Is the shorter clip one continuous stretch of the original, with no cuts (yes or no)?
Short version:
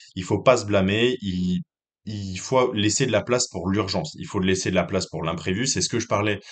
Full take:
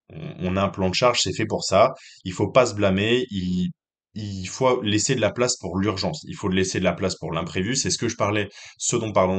yes